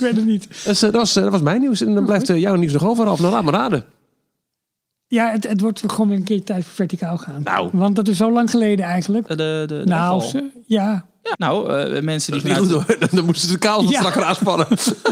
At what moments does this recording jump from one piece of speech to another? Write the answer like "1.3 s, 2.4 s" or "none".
9.3 s, 11.3 s

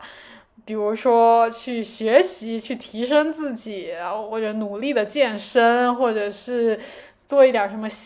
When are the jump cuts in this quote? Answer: none

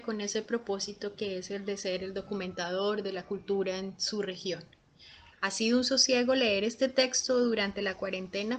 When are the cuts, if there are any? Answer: 5.3 s

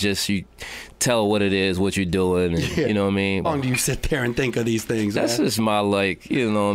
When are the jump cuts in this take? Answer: 3.4 s

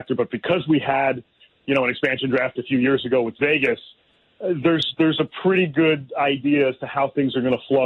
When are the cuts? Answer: none

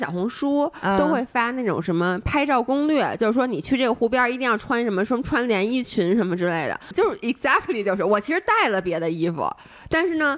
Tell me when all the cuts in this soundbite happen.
6.9 s

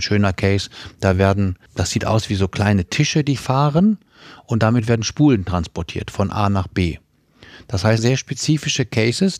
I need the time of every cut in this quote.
1.7 s, 8.0 s

